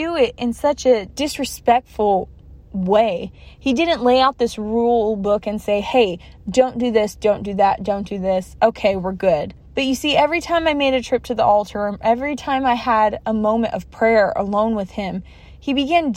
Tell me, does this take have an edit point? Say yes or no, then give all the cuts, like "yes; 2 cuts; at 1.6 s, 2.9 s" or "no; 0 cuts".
no; 0 cuts